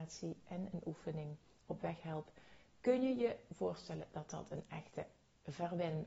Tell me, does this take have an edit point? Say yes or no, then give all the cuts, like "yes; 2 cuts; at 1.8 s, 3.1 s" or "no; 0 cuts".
no; 0 cuts